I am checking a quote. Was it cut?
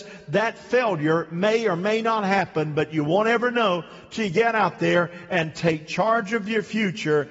no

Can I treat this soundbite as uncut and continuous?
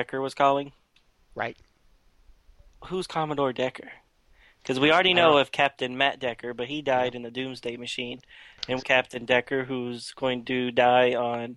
no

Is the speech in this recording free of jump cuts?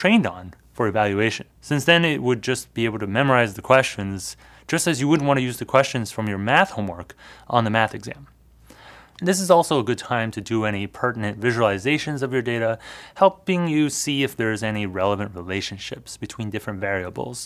no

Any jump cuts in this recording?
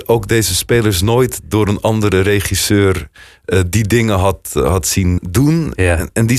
yes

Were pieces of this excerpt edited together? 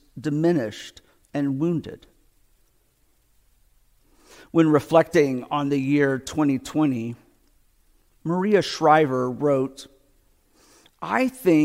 no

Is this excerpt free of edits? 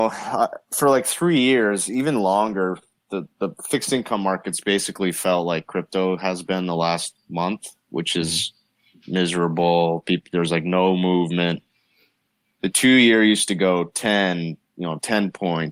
no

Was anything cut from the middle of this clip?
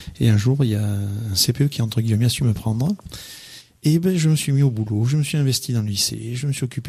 no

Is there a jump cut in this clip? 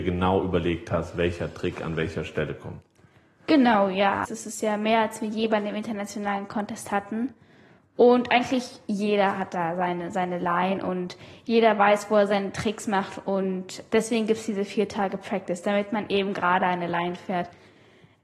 yes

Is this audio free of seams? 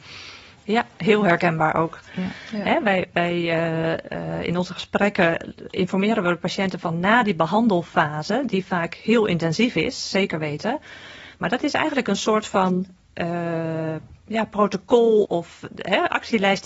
no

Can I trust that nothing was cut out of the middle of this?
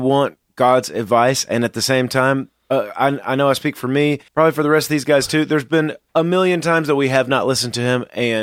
no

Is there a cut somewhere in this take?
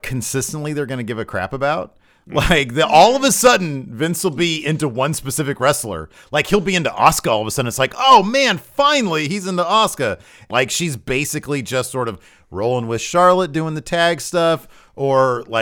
yes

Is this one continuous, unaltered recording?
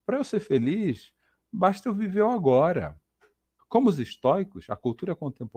no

